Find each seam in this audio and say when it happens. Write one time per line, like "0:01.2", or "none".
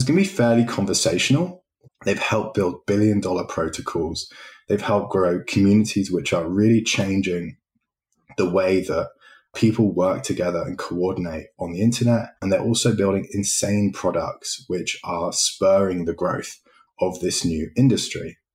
0:01.9
0:12.4